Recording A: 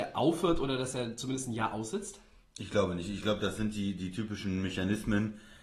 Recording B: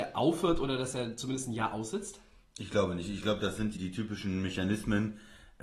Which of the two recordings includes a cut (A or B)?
B